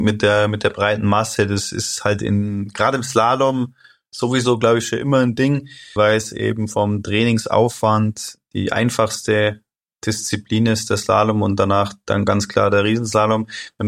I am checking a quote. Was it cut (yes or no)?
yes